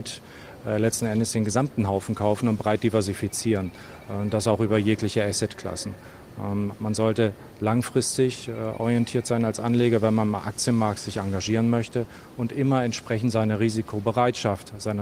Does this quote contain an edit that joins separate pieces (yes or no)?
no